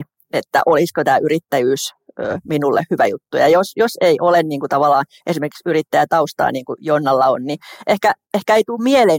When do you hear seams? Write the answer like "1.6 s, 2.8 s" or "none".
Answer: none